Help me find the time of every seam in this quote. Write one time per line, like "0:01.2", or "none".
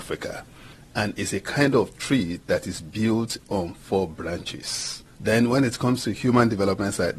0:05.2